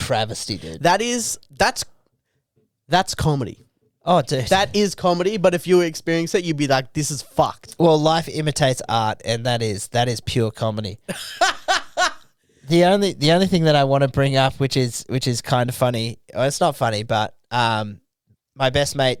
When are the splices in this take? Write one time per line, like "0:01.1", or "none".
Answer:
0:01.5